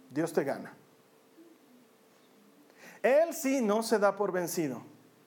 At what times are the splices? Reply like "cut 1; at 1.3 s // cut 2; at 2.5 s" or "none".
cut 1; at 3.0 s